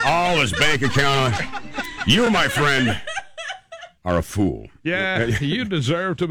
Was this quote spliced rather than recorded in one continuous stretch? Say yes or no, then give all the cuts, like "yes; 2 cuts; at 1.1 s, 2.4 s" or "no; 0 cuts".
no; 0 cuts